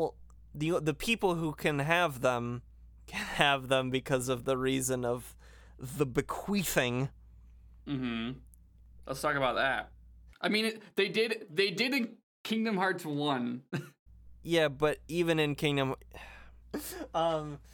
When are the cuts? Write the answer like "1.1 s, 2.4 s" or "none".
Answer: 10.3 s, 16.6 s